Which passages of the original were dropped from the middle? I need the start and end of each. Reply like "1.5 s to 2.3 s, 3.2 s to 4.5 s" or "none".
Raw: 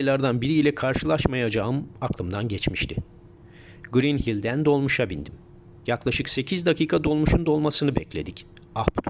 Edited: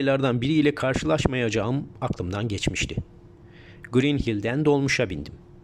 none